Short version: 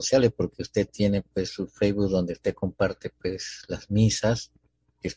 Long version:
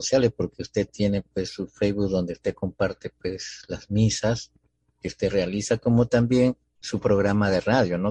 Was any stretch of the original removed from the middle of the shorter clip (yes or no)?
no